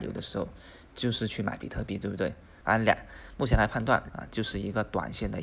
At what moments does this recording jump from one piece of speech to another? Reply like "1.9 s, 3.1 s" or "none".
2.6 s, 4.1 s